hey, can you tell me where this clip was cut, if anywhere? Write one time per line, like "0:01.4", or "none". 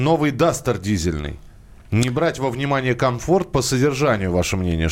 none